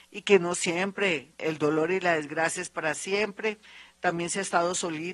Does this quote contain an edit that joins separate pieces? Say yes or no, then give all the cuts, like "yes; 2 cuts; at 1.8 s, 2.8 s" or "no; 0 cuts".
yes; 1 cut; at 1.4 s